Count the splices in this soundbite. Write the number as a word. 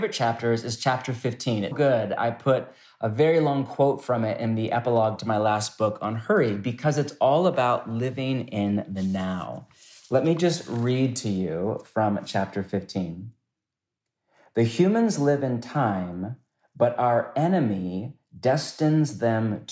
one